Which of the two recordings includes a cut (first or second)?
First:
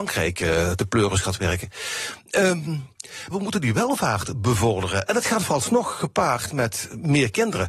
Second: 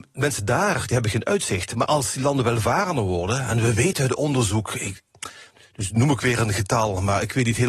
first